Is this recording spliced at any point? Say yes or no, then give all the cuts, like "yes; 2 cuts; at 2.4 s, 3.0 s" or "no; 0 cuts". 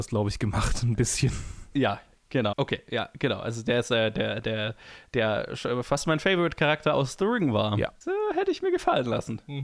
yes; 2 cuts; at 2.5 s, 8.0 s